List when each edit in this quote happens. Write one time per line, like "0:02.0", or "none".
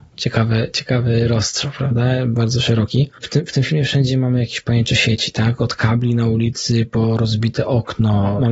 0:03.2